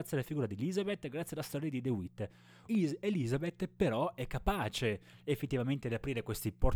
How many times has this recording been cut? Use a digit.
1